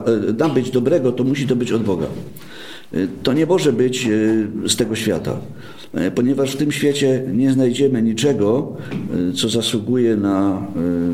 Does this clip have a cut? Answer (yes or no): no